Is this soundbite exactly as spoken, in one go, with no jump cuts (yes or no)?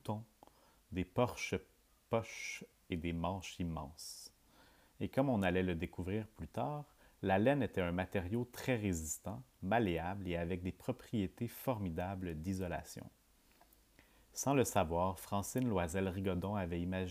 no